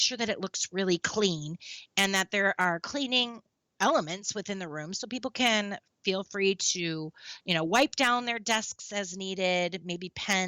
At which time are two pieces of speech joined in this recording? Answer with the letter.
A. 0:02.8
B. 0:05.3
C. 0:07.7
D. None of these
D